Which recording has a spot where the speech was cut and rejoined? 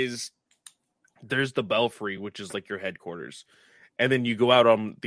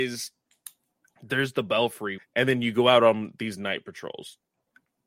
second; 1 cut; at 2.2 s

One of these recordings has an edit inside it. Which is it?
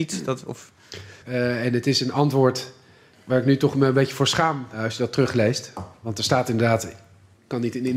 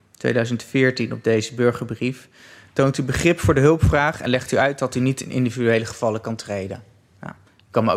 first; 1 cut; at 1.2 s

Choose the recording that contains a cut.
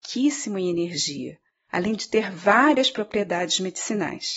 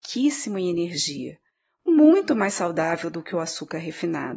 first; 1 cut; at 1.7 s

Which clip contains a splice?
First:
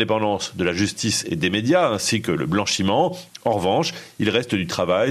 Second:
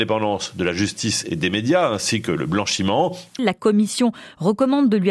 second; 1 cut; at 3.4 s

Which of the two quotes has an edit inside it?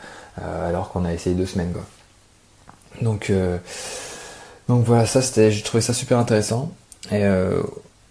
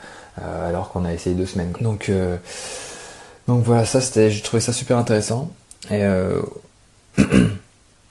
second; 1 cut; at 1.7 s

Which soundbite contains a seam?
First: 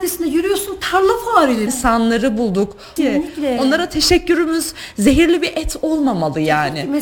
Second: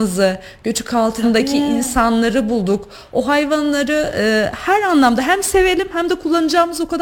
first; 2 cuts; at 1.7 s, 3.0 s

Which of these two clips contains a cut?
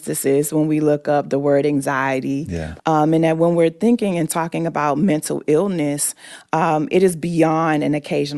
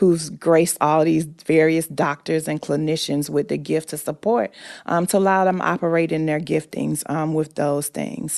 first; 1 cut; at 2.8 s

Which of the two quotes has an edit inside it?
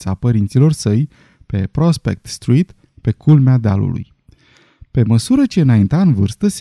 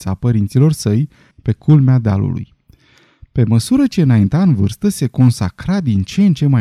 second; 1 cut; at 1.3 s

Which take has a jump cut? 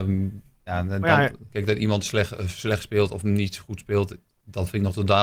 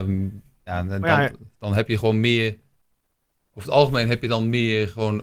first; 1 cut; at 1.5 s

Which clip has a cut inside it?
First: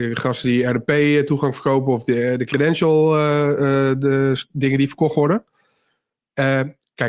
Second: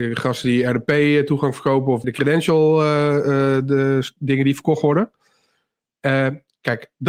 second; 1 cut; at 2.0 s

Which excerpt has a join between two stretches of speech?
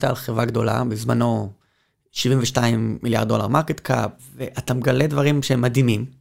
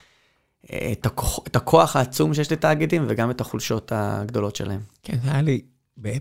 first; 1 cut; at 4.2 s

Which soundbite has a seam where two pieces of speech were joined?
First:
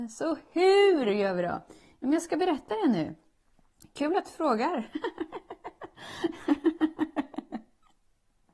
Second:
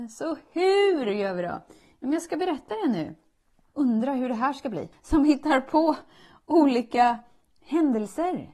second; 2 cuts; at 3.7 s, 4.9 s

